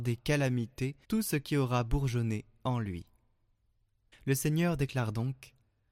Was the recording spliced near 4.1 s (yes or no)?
yes